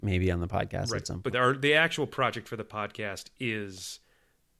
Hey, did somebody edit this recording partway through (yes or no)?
yes